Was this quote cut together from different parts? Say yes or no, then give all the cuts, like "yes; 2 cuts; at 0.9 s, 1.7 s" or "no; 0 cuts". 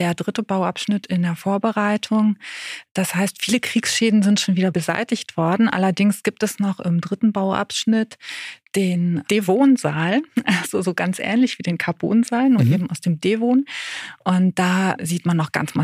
no; 0 cuts